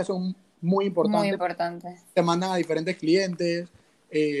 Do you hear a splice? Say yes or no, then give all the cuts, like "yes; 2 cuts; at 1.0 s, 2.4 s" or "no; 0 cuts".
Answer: no; 0 cuts